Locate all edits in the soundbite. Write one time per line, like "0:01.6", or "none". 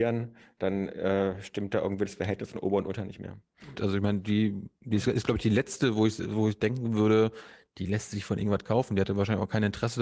0:03.8